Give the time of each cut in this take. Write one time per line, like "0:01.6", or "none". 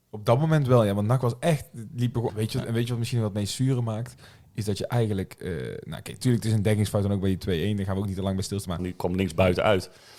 0:02.3
0:08.8